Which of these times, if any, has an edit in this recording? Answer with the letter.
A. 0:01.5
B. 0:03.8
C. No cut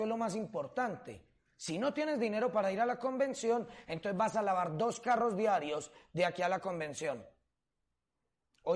C